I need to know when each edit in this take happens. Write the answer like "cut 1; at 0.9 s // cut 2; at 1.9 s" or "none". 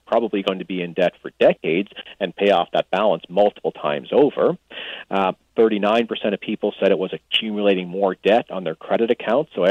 none